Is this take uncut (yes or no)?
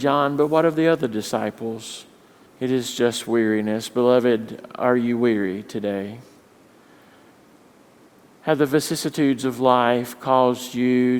no